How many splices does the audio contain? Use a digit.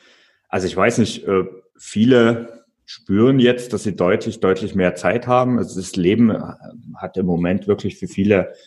0